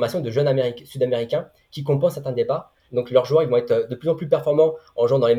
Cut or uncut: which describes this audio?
cut